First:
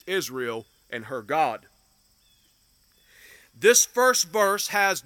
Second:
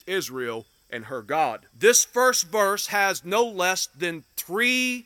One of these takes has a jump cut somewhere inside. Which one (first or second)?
second